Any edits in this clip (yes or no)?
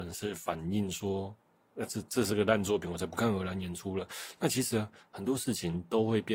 yes